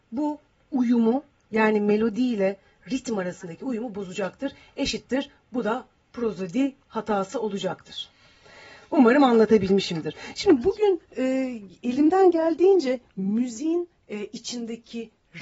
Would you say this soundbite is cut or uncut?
uncut